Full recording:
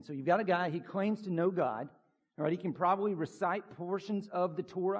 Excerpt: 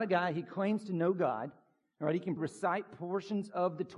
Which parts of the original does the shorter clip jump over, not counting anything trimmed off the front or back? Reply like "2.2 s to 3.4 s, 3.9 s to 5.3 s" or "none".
2.7 s to 3.1 s